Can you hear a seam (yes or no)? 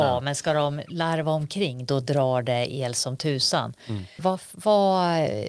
yes